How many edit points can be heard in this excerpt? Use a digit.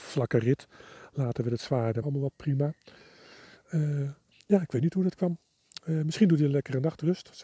1